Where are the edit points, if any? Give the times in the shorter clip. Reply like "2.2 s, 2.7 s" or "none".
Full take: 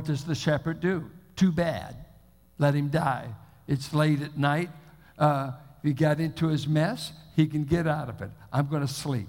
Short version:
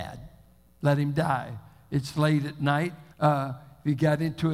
3.1 s